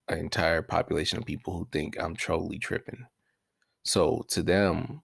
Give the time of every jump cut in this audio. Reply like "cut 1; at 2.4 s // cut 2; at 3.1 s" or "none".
none